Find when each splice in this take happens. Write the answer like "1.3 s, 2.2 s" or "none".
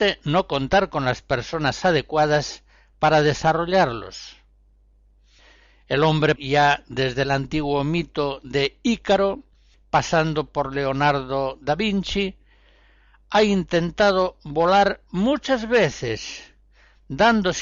6.4 s

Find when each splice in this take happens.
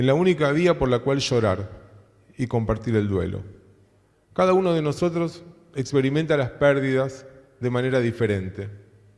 4.1 s

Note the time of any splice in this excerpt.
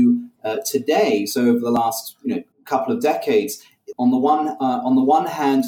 2.5 s, 3.9 s

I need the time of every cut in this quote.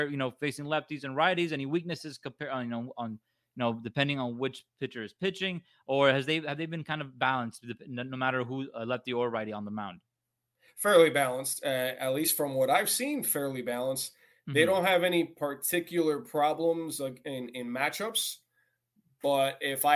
none

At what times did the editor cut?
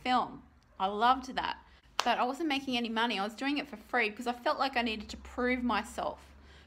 none

